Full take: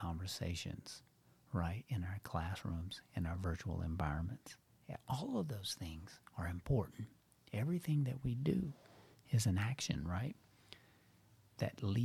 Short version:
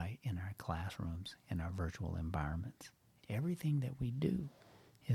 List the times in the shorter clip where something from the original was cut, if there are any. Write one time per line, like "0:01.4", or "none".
0:03.2